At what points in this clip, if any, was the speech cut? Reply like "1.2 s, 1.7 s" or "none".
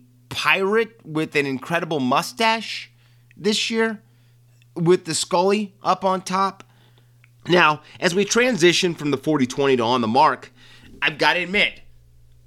7.4 s